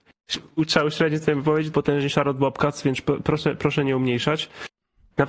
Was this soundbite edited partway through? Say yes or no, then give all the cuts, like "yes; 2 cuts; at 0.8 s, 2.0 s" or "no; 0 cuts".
yes; 1 cut; at 1.7 s